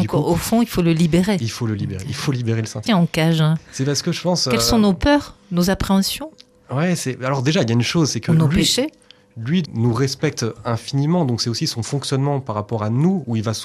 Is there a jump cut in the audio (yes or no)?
yes